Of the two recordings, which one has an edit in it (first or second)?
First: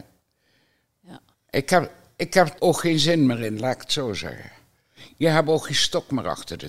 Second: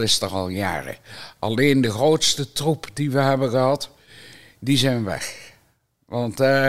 first